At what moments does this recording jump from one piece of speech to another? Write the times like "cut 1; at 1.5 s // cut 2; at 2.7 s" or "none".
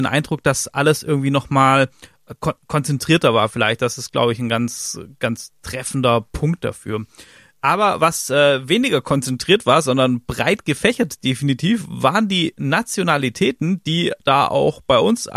none